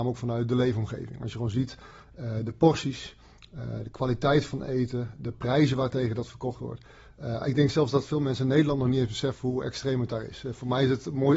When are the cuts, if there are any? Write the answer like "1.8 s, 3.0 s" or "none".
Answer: none